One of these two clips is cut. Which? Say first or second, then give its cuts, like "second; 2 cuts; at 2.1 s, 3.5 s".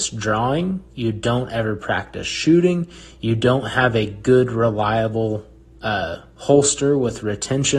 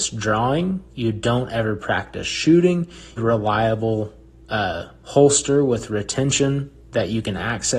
second; 1 cut; at 3.2 s